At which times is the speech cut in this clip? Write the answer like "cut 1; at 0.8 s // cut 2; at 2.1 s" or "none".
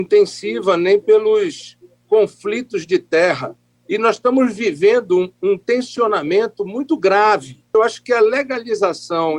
none